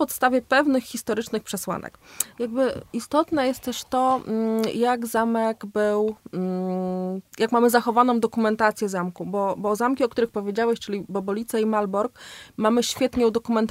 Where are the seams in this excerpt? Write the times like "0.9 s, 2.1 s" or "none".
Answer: 2.3 s

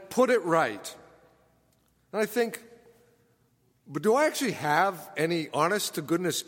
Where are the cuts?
none

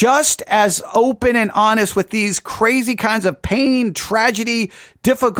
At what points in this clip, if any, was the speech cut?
none

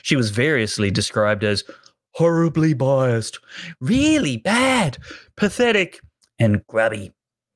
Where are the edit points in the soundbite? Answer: none

